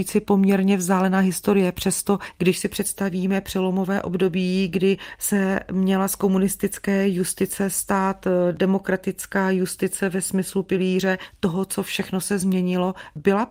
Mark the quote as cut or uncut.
uncut